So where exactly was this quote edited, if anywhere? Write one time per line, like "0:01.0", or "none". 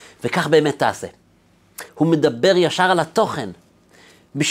0:01.9